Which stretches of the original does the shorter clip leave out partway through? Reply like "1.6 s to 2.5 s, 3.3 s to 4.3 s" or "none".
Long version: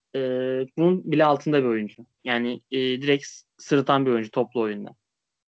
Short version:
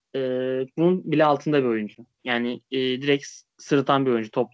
none

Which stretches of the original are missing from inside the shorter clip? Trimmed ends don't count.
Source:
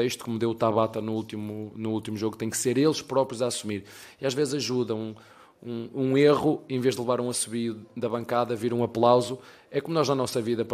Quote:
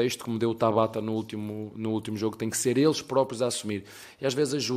none

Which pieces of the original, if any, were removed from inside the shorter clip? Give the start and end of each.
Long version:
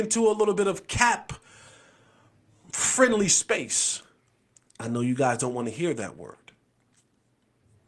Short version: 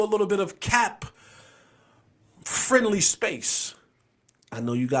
none

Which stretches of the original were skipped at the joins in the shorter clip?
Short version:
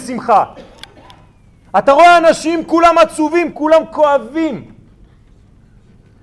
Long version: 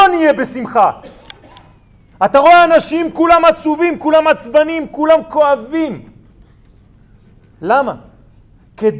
4.0 s to 4.9 s

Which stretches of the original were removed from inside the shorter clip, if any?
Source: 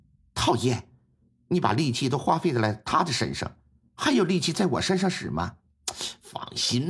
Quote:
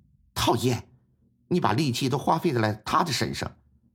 none

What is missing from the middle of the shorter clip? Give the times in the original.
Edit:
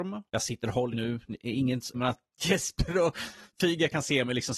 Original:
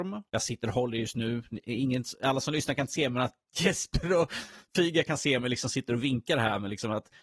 0.9 s to 1.1 s, 2.2 s to 3.1 s

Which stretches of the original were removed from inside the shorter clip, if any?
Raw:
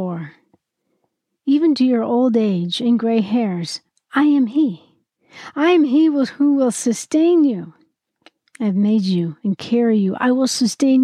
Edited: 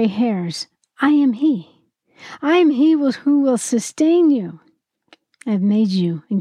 none

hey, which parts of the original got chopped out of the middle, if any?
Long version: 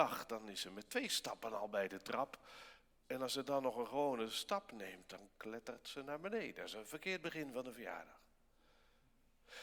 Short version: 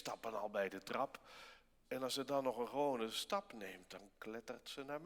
none

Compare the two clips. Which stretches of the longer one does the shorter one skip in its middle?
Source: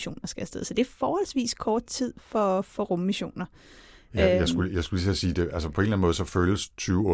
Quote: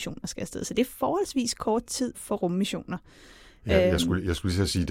2.1 s to 2.6 s

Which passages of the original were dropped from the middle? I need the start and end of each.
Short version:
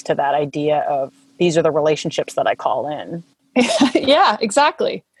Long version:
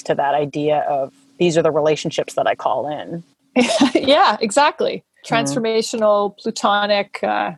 none

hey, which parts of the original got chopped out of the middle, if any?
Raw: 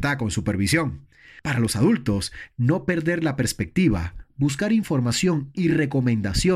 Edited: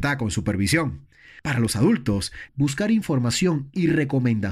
2.5 s to 4.3 s

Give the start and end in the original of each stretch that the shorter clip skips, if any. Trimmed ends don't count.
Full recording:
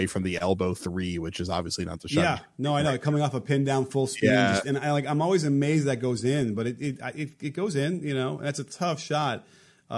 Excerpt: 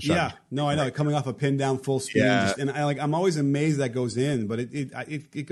none

